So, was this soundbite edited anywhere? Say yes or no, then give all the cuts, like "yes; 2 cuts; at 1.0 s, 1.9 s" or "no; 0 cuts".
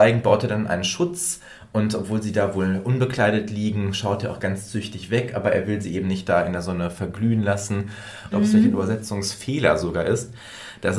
yes; 1 cut; at 8.3 s